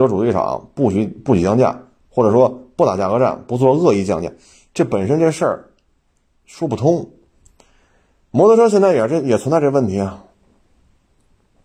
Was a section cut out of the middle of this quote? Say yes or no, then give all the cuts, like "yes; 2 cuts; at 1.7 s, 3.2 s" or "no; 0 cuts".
no; 0 cuts